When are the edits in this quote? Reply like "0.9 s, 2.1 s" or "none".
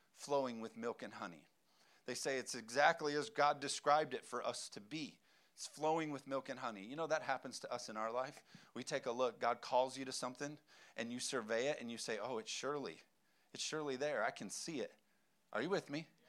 none